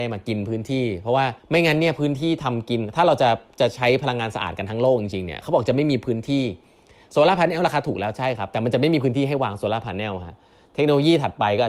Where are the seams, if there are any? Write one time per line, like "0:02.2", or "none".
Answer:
0:01.4